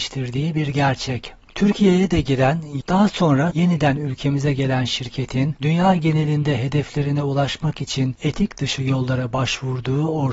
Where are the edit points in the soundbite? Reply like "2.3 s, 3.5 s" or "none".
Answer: 2.8 s